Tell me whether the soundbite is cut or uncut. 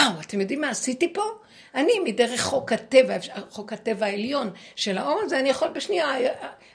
uncut